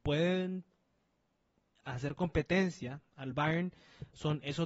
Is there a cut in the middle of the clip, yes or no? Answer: no